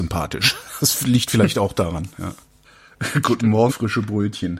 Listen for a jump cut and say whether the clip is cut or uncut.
cut